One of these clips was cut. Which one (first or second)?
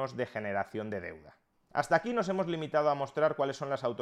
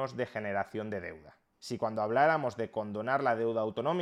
second